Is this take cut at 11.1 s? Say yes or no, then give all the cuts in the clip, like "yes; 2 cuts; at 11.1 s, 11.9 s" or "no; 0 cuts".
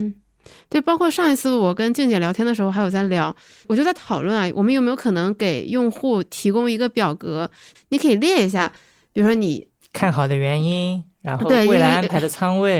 no; 1 cut; at 7.7 s